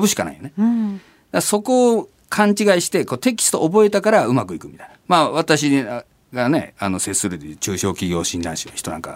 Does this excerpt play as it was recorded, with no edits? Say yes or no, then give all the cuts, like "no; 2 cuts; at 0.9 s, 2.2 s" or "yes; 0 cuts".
yes; 0 cuts